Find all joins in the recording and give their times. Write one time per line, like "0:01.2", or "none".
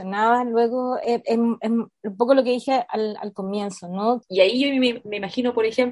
0:04.2